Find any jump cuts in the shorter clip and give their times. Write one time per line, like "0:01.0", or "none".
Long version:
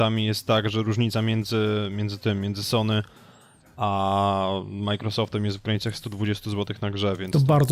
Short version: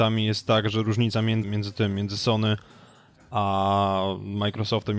0:01.4